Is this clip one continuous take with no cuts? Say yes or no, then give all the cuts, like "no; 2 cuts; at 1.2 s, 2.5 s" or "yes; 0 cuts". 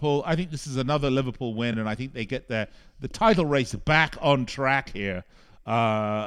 yes; 0 cuts